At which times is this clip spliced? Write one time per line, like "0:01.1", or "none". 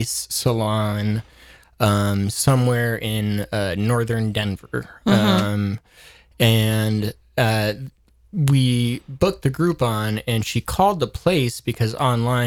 none